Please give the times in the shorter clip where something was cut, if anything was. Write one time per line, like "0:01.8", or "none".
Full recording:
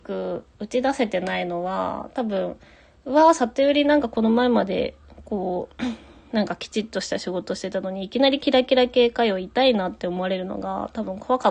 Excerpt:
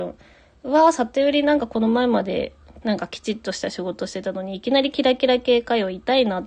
0:02.8